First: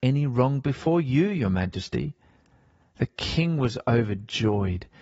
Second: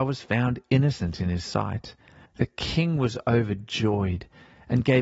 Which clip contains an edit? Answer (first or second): second